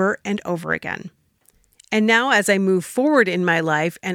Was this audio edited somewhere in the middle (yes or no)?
no